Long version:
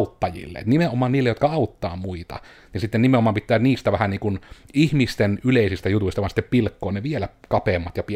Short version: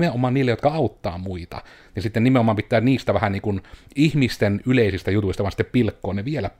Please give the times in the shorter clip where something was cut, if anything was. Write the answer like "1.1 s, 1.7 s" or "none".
none